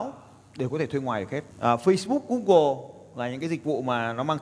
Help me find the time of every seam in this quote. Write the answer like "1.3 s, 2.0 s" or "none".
1.5 s